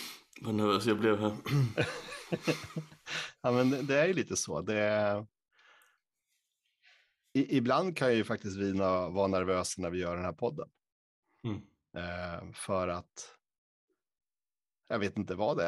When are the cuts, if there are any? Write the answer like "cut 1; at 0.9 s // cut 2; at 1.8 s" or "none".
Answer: none